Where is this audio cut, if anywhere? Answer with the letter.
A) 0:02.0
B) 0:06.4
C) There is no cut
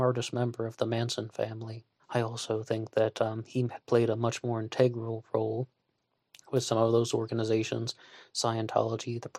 A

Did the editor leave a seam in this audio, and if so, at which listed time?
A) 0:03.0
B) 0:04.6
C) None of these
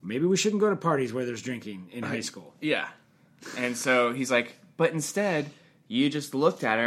A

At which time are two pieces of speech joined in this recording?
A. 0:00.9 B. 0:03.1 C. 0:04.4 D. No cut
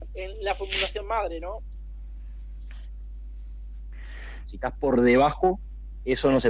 C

